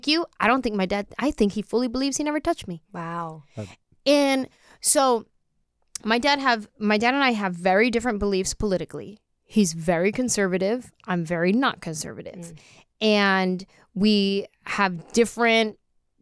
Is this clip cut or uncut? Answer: uncut